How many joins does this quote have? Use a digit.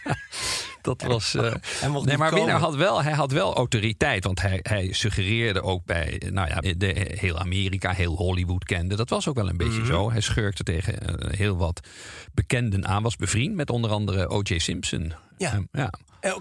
1